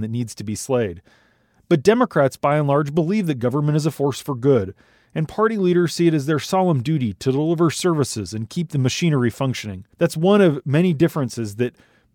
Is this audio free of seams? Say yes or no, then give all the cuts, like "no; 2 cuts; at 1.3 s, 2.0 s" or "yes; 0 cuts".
no; 1 cut; at 9.9 s